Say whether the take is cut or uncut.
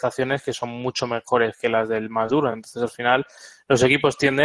uncut